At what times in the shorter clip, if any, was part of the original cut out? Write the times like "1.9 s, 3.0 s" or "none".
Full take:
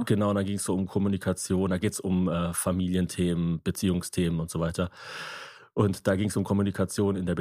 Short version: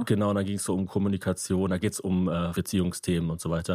2.5 s